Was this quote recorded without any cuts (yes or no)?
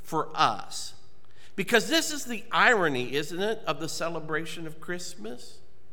yes